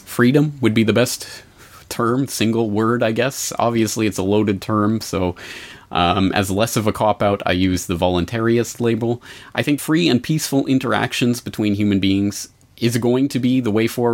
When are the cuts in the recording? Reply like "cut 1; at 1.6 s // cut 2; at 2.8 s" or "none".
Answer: cut 1; at 9.8 s